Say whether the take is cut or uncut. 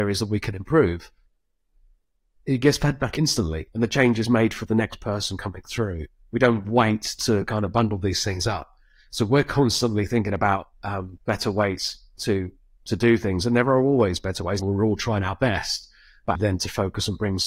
cut